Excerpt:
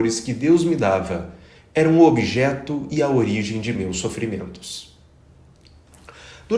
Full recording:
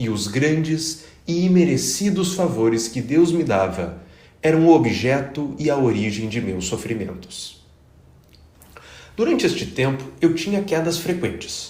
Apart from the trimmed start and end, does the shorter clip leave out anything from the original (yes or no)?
no